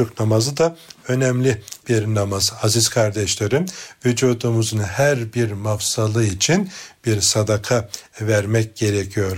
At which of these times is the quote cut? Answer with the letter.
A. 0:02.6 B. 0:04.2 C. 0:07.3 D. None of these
D